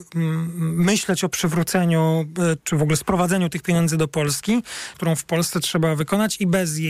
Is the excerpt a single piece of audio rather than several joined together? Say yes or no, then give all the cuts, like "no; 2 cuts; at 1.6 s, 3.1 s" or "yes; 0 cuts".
no; 2 cuts; at 2.6 s, 4.9 s